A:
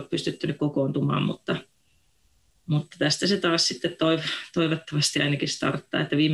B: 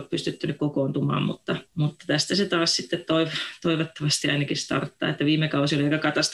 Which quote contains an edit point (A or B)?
B